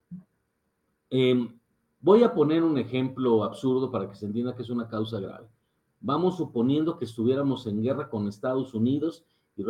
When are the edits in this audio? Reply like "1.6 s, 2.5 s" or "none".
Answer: none